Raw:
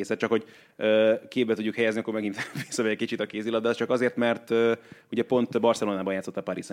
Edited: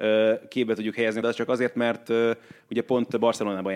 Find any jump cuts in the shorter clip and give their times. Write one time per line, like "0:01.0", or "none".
0:01.2